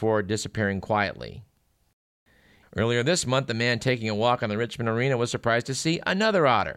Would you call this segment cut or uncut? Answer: cut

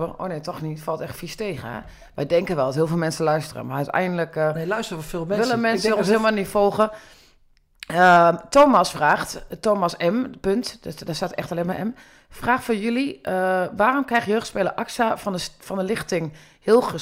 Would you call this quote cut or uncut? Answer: uncut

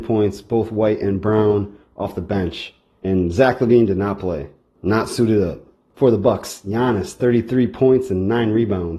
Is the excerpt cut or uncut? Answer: uncut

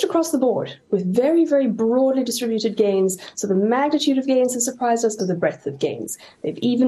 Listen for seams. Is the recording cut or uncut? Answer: cut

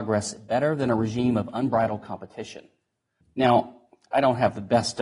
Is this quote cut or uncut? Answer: cut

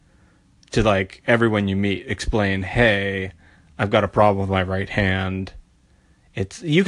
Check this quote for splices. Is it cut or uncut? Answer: uncut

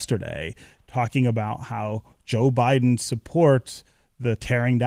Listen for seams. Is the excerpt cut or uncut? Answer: uncut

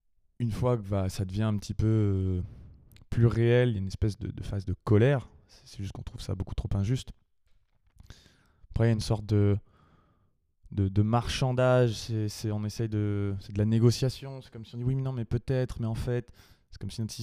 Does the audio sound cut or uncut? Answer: uncut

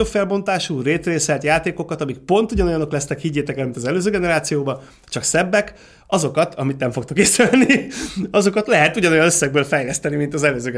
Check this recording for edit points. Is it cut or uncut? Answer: uncut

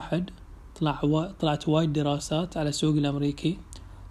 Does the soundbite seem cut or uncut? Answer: uncut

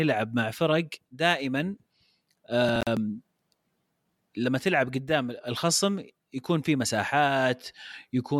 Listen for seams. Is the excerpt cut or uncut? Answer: uncut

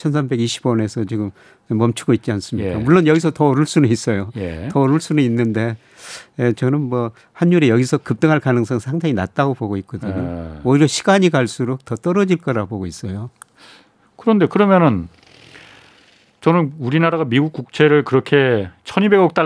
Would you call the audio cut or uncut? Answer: uncut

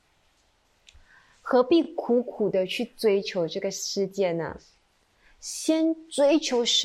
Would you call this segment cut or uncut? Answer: uncut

